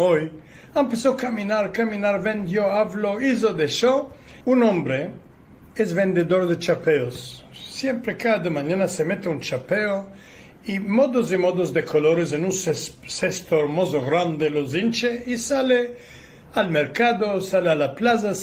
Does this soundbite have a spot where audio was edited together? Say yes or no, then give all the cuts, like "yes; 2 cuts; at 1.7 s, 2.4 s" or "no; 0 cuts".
yes; 1 cut; at 4.4 s